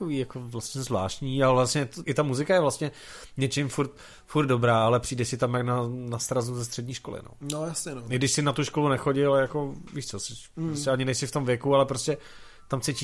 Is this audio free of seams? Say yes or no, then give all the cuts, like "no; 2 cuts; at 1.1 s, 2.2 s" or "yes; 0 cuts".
no; 1 cut; at 2.0 s